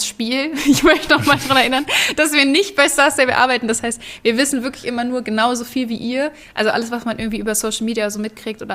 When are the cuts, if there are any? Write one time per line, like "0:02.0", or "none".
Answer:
none

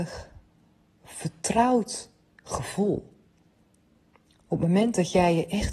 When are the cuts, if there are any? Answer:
none

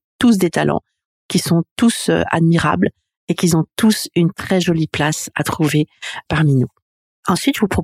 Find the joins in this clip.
0:06.3

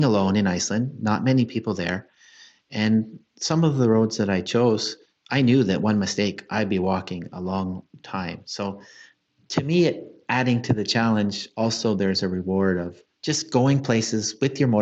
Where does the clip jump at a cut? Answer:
none

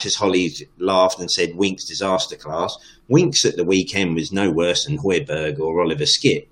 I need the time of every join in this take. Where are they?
none

